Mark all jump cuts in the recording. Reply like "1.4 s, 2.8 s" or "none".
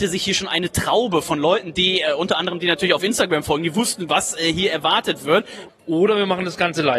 5.7 s